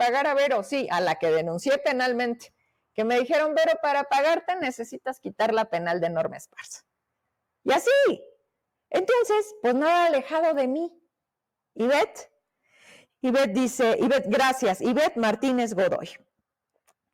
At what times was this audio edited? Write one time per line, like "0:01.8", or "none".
none

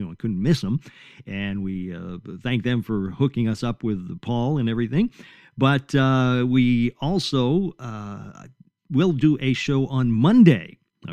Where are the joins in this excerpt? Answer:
none

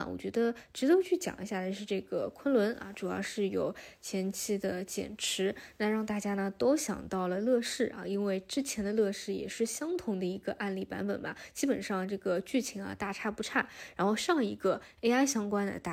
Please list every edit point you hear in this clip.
0:13.9

